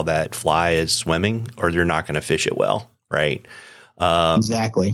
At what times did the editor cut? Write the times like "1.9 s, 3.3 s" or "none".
none

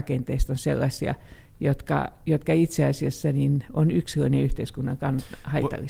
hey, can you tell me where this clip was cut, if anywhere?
none

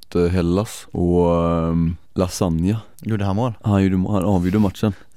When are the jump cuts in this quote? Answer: none

